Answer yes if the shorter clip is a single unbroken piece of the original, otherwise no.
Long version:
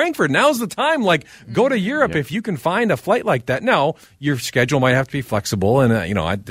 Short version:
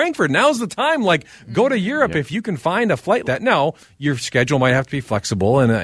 no